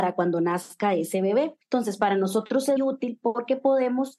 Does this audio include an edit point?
yes; 2 cuts; at 1.6 s, 2.8 s

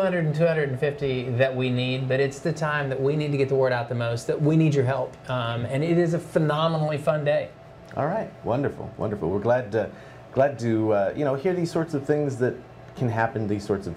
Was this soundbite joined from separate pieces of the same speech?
no; 0 cuts

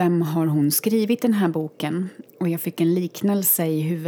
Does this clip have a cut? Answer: no; 0 cuts

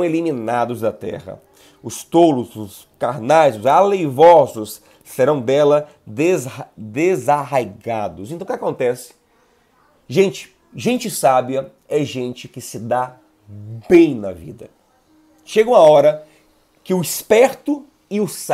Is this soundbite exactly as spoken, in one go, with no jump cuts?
yes; 0 cuts

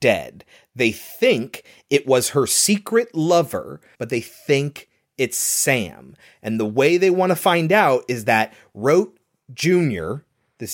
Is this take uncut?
no; 1 cut; at 3.9 s

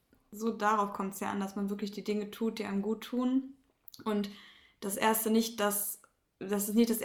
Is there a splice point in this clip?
no; 0 cuts

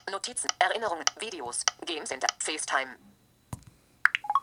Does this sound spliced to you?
no; 0 cuts

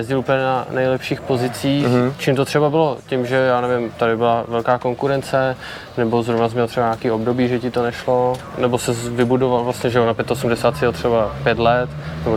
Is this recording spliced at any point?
no; 0 cuts

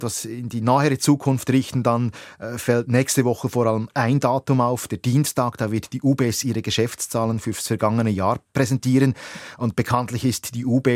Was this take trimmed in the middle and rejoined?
no; 0 cuts

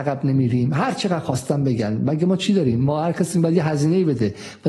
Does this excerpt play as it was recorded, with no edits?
yes; 0 cuts

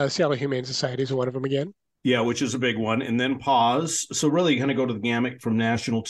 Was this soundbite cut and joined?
no; 0 cuts

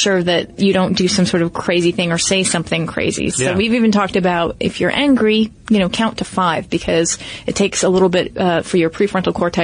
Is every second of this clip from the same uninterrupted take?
no; 1 cut; at 3.3 s

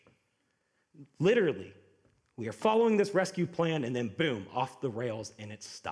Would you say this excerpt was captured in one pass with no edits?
yes; 0 cuts

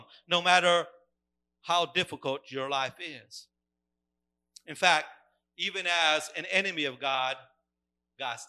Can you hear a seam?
no; 0 cuts

